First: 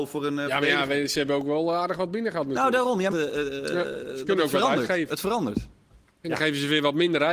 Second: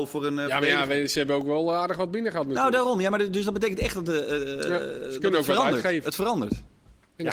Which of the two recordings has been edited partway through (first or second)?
first